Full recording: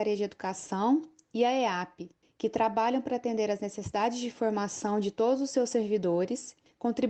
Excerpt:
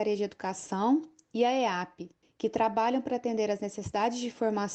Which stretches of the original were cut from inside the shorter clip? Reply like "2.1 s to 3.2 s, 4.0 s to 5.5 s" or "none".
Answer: none